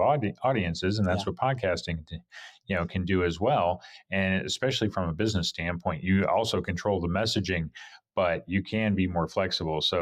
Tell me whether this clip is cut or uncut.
uncut